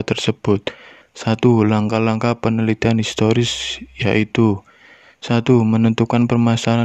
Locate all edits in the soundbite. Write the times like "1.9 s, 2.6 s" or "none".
1.0 s